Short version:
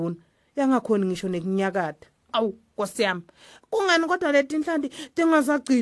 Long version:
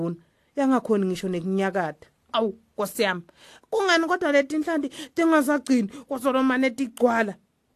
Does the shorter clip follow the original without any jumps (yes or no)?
yes